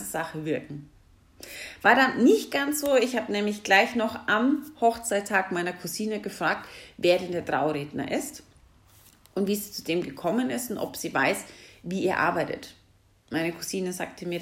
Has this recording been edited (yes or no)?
no